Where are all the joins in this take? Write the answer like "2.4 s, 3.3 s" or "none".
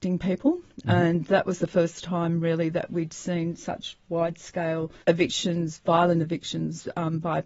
5.0 s